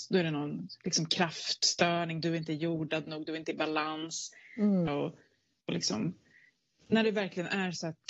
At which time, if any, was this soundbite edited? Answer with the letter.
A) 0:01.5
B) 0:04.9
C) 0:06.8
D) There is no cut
B